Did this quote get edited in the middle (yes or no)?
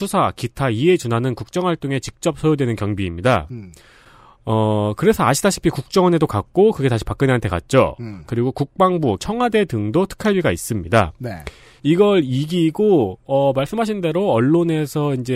yes